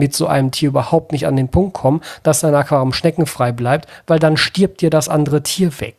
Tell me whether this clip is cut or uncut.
uncut